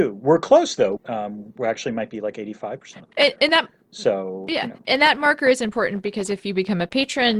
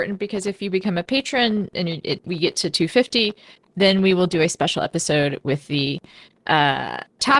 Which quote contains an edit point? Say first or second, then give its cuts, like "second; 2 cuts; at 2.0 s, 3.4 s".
first; 1 cut; at 1.0 s